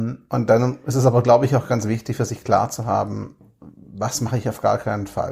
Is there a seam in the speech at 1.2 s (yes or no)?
no